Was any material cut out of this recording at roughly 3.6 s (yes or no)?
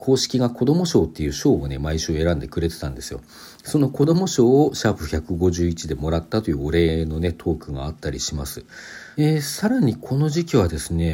no